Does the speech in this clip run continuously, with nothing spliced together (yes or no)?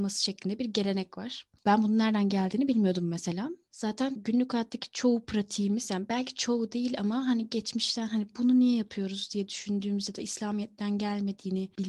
yes